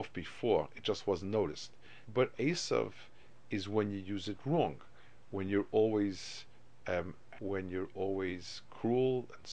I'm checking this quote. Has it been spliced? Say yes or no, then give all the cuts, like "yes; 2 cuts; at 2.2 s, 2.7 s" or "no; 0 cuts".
yes; 2 cuts; at 2.1 s, 7.3 s